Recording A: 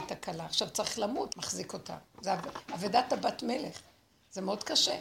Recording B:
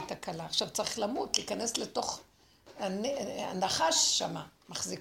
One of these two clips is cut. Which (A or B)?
A